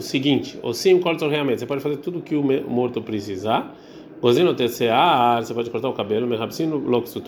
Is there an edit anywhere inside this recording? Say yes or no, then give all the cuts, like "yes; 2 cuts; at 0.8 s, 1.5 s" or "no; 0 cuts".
no; 0 cuts